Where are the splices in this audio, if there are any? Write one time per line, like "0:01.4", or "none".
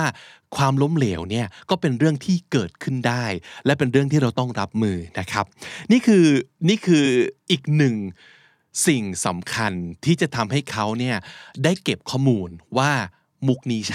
none